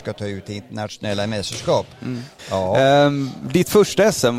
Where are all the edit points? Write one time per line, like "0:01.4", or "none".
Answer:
0:02.4